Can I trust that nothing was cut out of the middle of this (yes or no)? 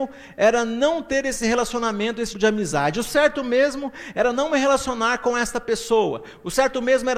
no